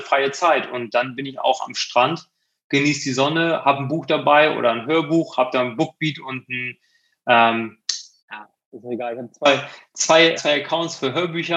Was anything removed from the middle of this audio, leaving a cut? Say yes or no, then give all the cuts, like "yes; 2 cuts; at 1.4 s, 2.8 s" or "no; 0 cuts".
yes; 2 cuts; at 8.2 s, 10.4 s